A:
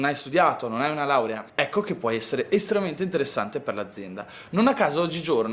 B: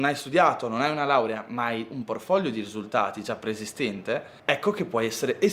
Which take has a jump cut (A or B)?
A